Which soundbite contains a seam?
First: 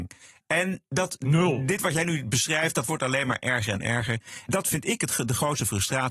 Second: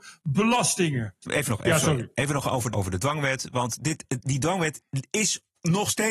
second; 1 cut; at 2.7 s

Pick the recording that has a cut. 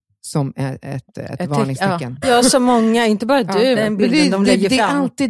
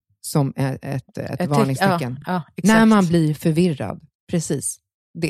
first; 2 cuts; at 2.2 s, 3.8 s

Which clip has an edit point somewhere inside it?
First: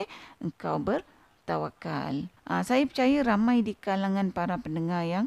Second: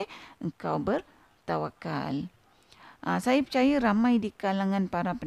first; 1 cut; at 2.4 s

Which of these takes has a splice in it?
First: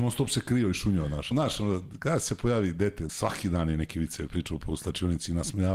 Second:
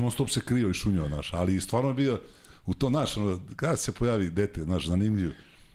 first; 2 cuts; at 1.3 s, 3.1 s

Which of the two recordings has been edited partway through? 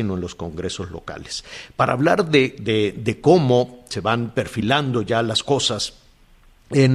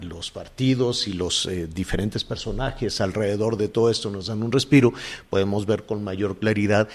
second; 1 cut; at 5.2 s

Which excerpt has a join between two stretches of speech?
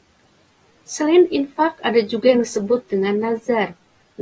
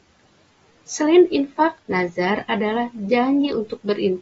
second; 1 cut; at 1.8 s

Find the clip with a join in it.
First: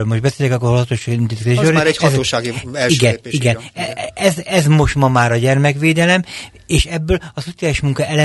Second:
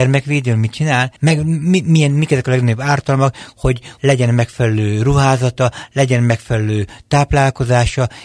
second; 2 cuts; at 1.2 s, 4.0 s

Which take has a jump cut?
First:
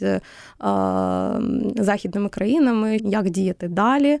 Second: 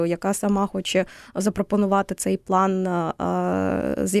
first; 1 cut; at 3.0 s

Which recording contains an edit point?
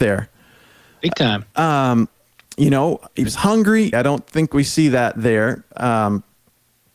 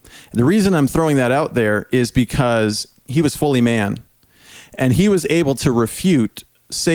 first; 1 cut; at 3.9 s

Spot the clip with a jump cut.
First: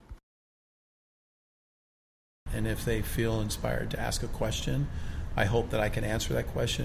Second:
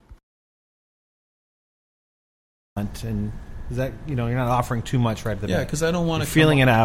first; 1 cut; at 2.5 s

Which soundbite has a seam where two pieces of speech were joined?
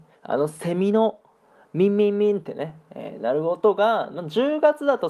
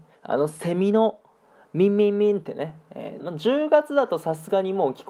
second; 1 cut; at 3.2 s

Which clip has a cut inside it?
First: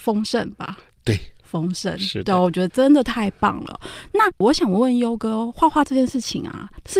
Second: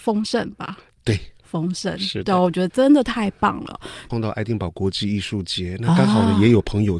second; 1 cut; at 4.1 s

